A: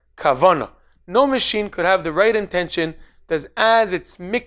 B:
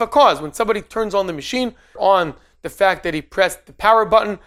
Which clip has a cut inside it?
B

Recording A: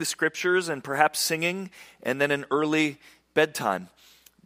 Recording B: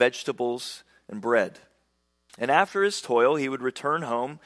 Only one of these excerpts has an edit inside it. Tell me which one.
B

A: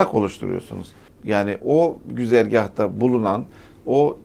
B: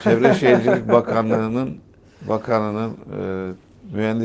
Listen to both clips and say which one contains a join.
A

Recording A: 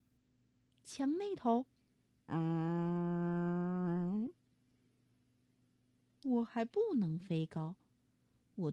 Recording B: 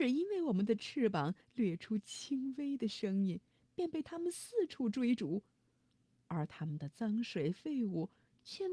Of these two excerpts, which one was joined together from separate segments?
A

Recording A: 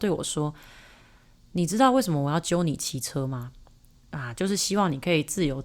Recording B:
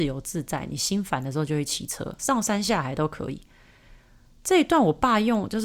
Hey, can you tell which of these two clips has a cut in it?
B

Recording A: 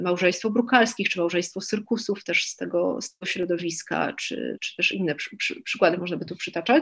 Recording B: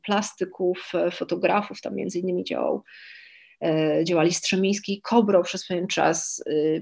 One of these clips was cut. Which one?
A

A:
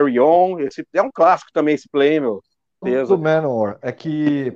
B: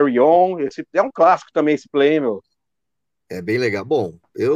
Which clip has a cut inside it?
A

